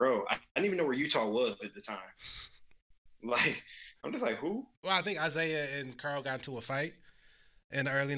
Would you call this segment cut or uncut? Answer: cut